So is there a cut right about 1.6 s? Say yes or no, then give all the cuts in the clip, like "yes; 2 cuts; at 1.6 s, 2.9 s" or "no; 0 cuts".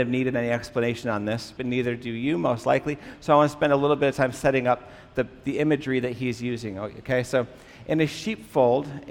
yes; 1 cut; at 1.6 s